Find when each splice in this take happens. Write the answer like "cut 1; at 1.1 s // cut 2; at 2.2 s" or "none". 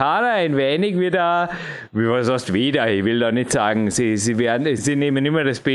cut 1; at 4.8 s